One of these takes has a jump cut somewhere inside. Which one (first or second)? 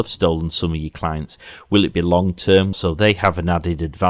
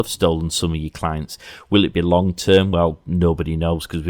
first